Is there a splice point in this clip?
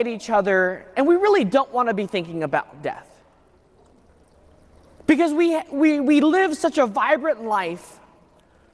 no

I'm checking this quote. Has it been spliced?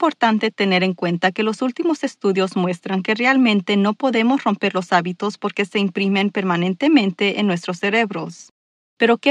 no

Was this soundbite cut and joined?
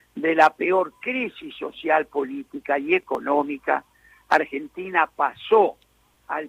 no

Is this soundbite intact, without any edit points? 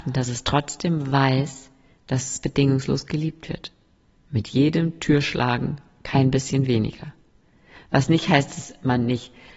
yes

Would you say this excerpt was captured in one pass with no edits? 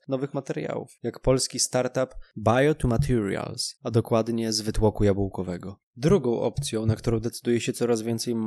no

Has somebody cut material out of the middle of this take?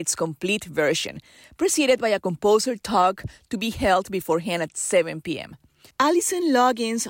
yes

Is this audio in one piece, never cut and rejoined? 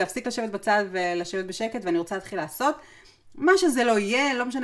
yes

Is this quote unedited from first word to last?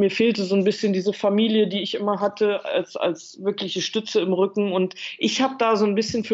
yes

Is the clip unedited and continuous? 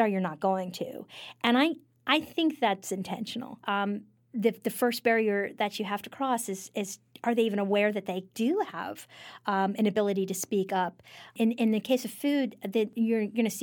no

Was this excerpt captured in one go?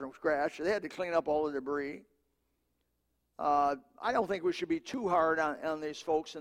yes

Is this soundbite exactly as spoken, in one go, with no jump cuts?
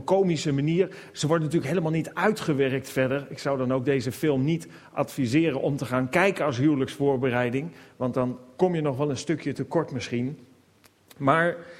yes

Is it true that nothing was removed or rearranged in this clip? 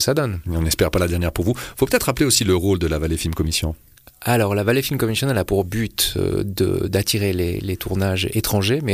yes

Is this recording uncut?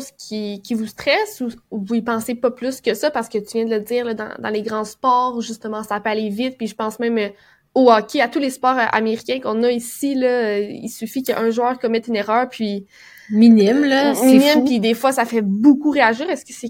yes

